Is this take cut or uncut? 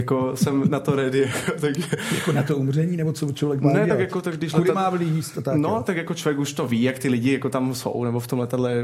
uncut